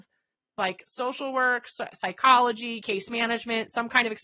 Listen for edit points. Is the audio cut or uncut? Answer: uncut